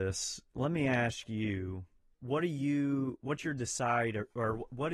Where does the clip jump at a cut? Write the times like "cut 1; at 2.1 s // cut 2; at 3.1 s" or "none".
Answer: cut 1; at 2.1 s